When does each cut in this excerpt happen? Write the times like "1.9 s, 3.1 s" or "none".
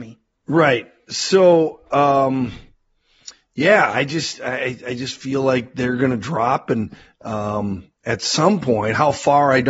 none